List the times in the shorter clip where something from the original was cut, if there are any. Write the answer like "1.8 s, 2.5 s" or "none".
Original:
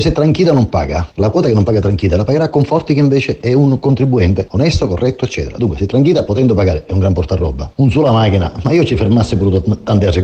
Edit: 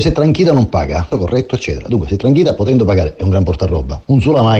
1.1 s